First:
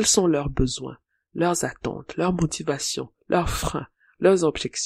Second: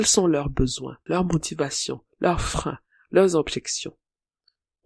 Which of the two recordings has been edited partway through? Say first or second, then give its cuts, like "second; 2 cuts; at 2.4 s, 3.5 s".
second; 1 cut; at 1.1 s